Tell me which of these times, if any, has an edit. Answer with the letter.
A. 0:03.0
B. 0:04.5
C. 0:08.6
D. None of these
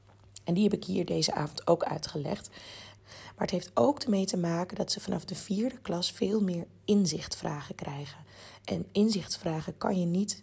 A